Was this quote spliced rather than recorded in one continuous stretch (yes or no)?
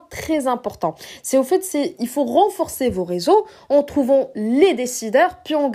no